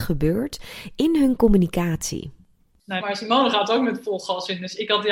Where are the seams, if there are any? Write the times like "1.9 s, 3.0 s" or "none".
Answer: 3.0 s